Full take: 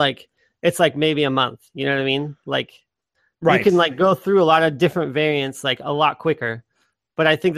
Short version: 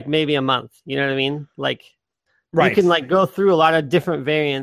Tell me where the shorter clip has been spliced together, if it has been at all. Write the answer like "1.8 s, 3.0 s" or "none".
none